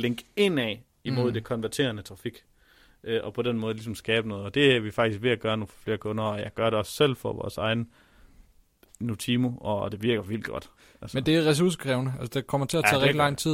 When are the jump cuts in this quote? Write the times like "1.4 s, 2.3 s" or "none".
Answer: none